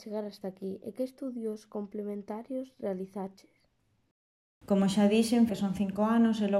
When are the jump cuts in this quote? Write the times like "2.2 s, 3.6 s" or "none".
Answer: 5.5 s